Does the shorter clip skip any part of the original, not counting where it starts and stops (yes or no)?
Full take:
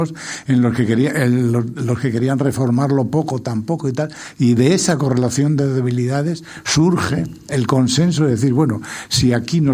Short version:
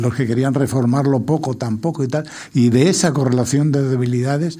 no